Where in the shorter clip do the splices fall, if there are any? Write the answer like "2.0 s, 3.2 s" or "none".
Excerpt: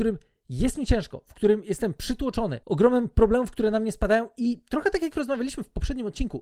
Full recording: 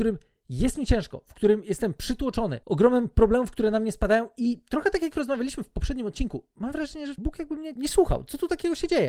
none

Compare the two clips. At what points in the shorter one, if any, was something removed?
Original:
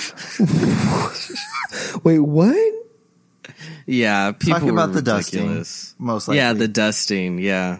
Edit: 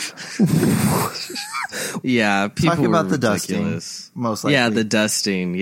2.0 s

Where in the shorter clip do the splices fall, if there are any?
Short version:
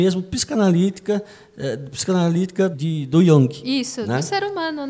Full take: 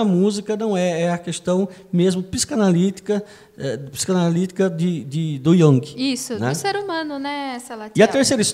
2.7 s

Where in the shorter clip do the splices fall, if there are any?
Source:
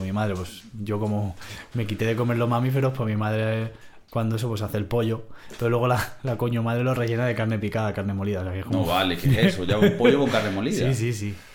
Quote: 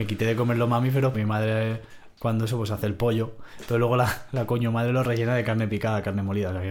1.1 s

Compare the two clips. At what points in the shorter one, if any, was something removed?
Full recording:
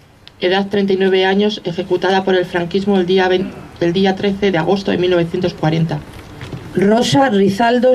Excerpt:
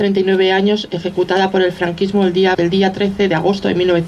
2.5 s

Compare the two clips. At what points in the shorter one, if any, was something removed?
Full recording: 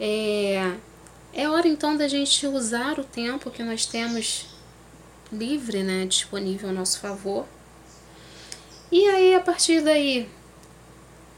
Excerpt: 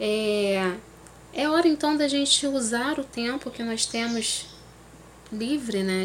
none

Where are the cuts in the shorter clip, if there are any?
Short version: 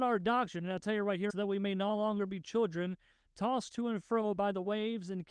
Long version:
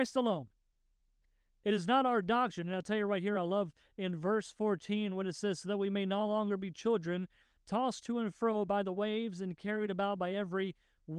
1.3 s

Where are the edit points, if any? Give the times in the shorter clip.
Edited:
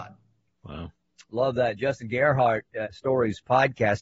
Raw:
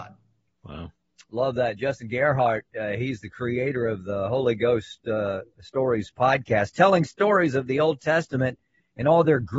2.8 s

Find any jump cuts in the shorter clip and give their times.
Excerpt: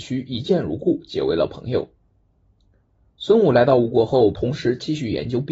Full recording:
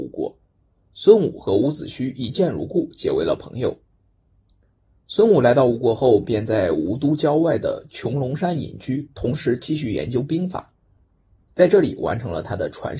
4.3 s

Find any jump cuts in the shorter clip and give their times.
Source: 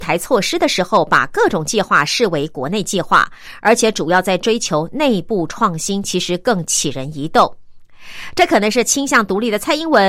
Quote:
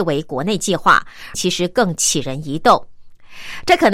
1.3 s

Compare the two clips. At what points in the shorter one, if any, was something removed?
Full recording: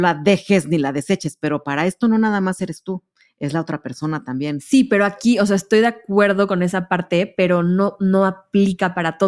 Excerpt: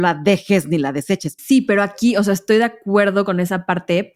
1.4 s

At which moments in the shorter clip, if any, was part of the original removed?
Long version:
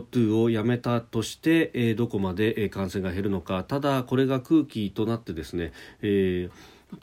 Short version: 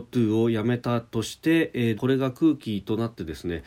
2.0 s

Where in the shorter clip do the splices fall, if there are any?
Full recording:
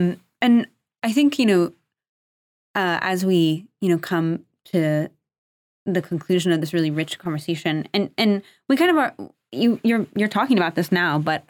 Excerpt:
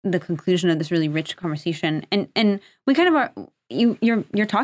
none

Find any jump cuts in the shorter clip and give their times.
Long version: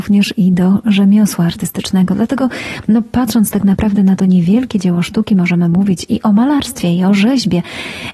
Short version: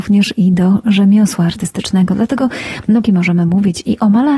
3.0 s

